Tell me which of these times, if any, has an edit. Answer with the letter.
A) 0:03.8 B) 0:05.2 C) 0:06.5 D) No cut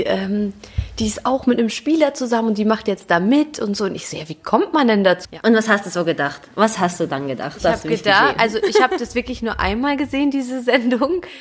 B